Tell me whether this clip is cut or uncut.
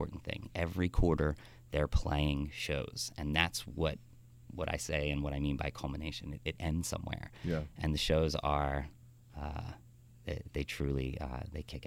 cut